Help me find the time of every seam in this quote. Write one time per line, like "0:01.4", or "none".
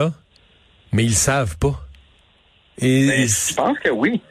0:02.7